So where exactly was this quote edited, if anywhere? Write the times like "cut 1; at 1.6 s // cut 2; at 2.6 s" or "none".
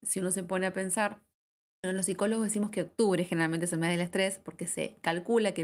cut 1; at 1.8 s